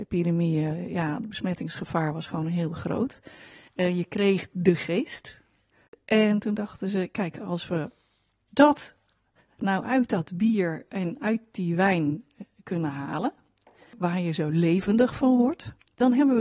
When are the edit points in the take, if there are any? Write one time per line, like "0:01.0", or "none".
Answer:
0:03.7

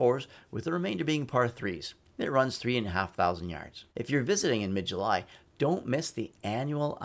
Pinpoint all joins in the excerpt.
0:03.9

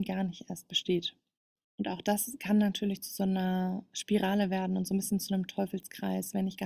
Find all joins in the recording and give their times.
0:01.6

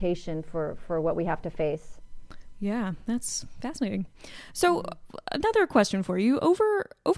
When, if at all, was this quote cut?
none

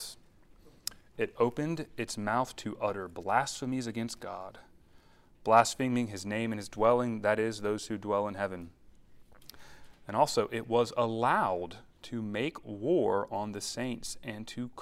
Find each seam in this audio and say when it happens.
none

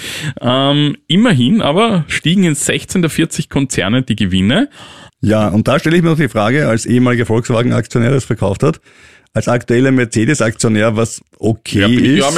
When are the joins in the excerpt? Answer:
0:05.1

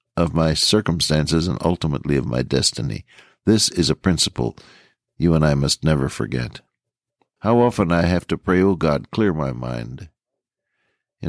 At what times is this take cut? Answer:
0:07.4

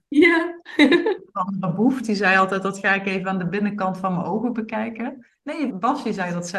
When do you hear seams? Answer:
0:05.7

